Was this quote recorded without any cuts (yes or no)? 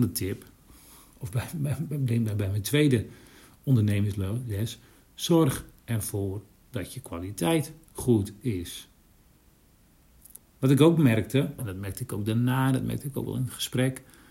no